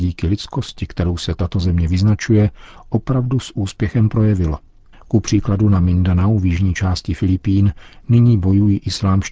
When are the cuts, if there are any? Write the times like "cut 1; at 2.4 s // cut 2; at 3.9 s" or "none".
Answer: cut 1; at 4.9 s